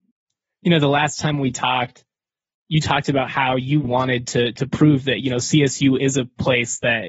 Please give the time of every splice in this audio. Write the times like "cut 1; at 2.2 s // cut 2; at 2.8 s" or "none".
cut 1; at 3.8 s